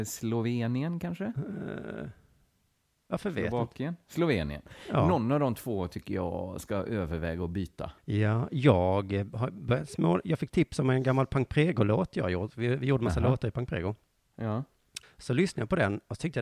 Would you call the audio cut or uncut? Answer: cut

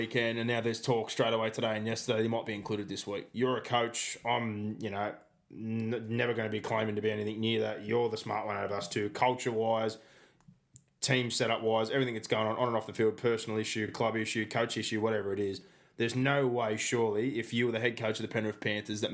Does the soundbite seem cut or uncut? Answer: uncut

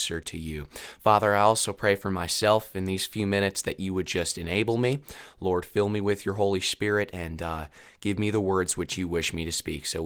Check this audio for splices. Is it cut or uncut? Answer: uncut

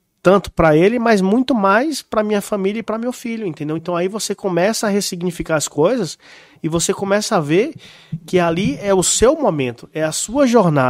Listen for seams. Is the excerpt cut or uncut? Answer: uncut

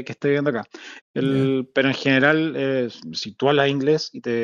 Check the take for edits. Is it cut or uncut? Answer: cut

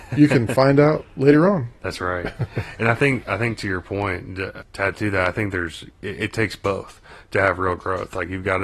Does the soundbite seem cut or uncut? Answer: uncut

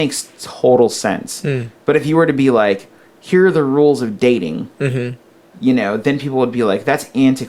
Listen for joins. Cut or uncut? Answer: uncut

